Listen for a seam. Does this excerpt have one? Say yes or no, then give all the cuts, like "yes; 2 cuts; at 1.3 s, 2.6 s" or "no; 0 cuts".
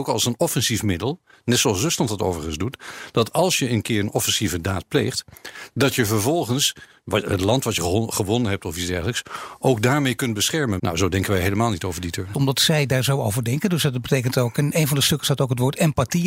yes; 2 cuts; at 10.8 s, 12.3 s